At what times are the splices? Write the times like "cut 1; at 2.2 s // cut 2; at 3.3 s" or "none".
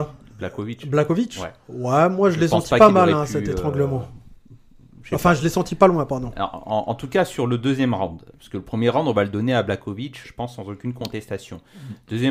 cut 1; at 10.2 s